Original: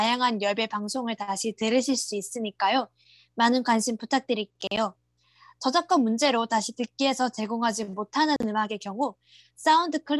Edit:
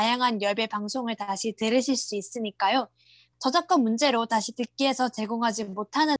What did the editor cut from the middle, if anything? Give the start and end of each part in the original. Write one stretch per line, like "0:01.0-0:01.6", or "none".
0:03.3-0:05.5